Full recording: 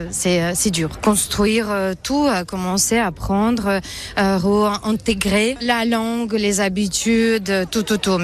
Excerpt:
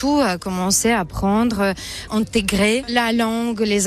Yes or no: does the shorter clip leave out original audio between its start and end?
yes